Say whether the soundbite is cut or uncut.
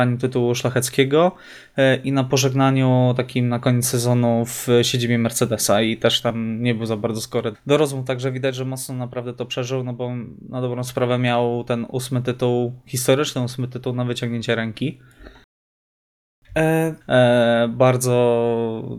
cut